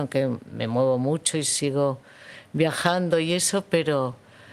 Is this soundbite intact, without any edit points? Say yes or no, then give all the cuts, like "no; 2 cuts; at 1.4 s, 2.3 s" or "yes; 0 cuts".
yes; 0 cuts